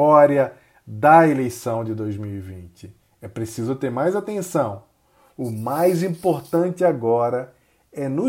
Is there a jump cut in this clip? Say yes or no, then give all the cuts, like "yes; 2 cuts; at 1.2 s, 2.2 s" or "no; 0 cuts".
no; 0 cuts